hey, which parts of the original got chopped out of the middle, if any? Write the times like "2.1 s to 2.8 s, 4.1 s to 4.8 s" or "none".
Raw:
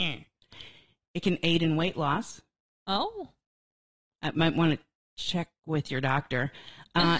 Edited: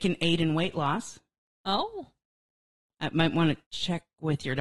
4.9 s to 5.1 s